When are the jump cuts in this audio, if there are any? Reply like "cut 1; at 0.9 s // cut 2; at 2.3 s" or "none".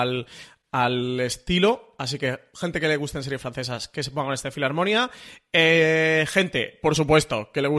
none